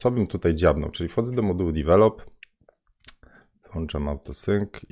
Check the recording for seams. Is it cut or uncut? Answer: uncut